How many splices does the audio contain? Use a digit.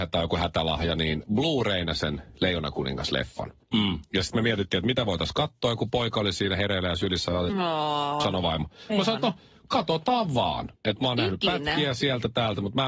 2